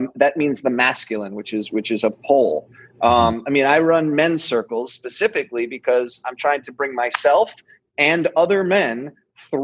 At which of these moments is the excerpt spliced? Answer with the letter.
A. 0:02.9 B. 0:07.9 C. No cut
C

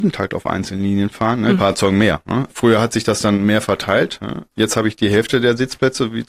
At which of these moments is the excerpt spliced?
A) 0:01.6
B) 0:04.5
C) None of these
A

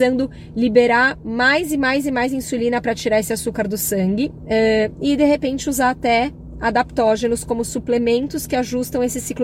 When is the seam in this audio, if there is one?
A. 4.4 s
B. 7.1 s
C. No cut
A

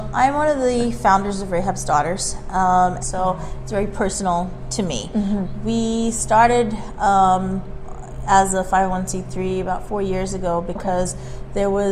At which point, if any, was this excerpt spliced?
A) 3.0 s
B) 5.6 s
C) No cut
A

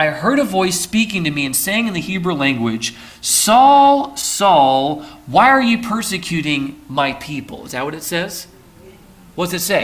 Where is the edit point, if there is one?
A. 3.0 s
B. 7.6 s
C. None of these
C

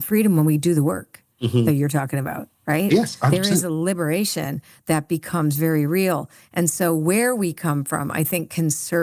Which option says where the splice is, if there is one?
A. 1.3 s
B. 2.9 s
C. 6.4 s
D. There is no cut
A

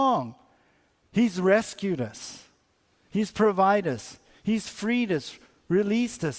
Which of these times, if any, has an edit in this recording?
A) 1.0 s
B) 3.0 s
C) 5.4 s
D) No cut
A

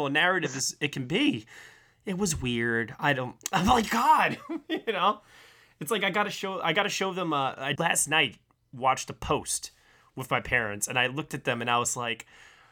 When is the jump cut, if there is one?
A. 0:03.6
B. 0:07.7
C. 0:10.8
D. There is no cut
B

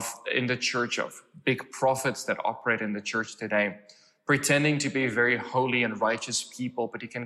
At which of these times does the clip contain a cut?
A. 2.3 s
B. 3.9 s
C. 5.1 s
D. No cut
D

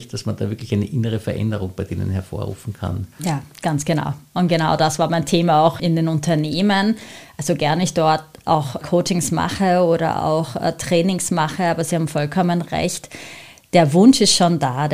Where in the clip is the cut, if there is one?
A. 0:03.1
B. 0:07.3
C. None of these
C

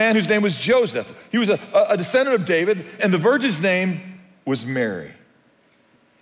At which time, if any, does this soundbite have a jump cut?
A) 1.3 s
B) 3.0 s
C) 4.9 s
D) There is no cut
B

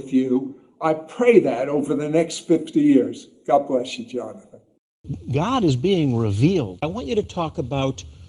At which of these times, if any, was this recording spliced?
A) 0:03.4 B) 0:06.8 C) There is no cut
B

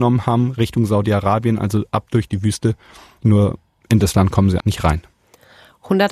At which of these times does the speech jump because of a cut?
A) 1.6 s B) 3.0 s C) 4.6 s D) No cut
C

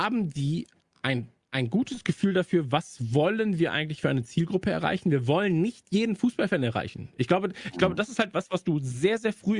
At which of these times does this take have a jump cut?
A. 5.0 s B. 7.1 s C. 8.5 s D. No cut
D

